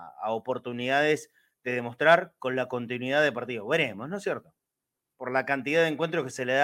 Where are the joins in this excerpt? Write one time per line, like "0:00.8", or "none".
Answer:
0:05.1